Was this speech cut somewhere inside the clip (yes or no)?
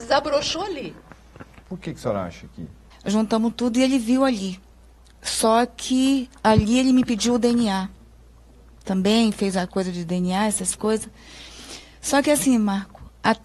yes